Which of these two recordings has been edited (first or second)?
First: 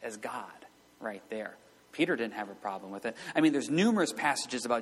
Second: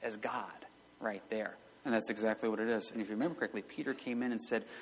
second